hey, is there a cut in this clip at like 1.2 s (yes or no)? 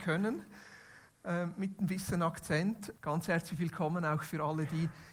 no